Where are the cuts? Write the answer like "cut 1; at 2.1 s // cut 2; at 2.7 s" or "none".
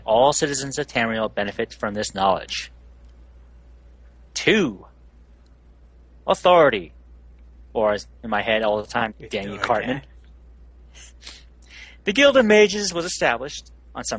cut 1; at 9.1 s